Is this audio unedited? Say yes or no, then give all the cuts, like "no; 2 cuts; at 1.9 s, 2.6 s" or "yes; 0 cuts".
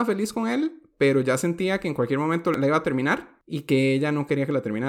yes; 0 cuts